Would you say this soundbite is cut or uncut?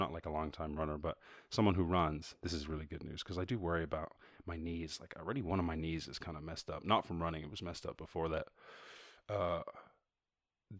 uncut